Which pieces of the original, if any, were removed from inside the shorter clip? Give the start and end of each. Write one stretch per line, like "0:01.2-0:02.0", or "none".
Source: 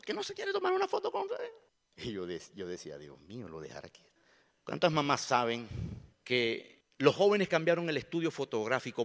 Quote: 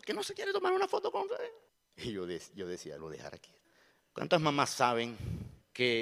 0:03.0-0:03.5